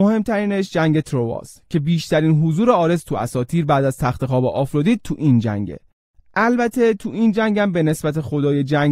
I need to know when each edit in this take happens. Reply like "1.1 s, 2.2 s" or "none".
none